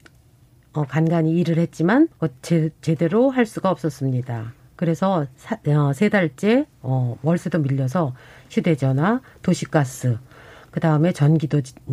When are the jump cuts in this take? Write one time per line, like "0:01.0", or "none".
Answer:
0:02.1